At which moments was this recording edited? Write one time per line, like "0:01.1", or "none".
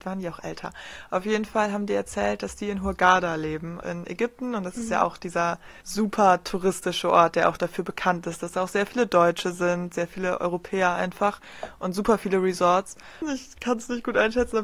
0:03.8
0:05.8
0:13.2